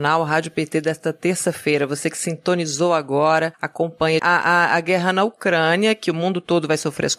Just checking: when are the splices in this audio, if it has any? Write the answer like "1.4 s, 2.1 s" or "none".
4.2 s